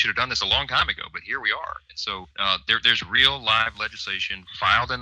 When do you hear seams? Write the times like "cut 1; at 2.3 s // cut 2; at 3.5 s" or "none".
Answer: cut 1; at 2.3 s